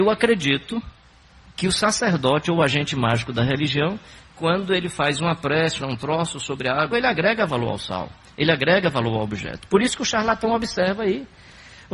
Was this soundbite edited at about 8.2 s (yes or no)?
no